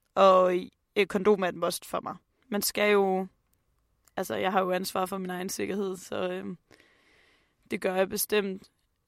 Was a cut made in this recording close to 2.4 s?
yes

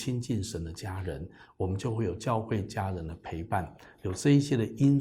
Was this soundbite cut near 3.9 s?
no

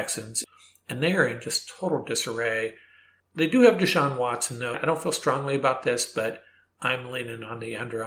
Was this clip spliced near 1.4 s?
no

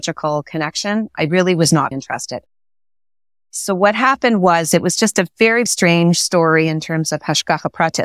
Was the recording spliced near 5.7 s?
yes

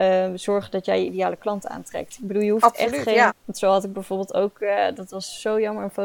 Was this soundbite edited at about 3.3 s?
yes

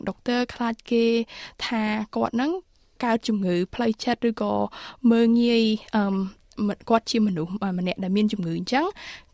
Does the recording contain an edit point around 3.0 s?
no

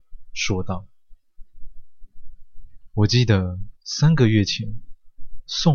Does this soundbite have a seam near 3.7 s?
yes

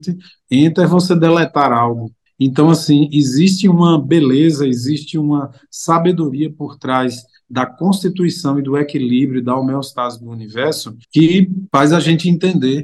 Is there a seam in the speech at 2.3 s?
yes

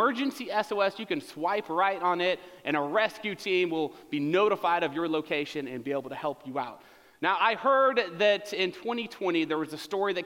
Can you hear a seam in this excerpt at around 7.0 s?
no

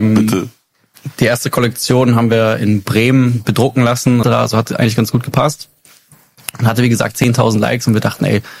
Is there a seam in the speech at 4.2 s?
yes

